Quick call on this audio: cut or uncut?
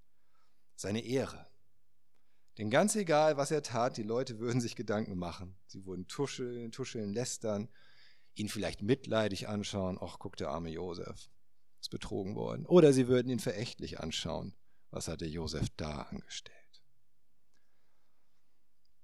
uncut